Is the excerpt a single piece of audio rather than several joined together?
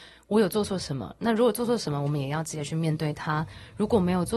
yes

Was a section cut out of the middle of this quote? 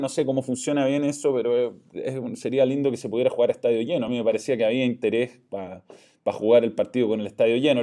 no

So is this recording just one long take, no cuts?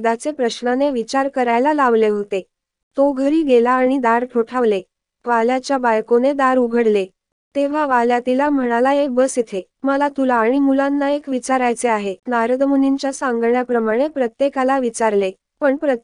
no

